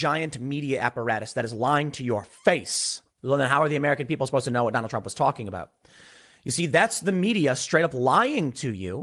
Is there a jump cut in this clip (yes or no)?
yes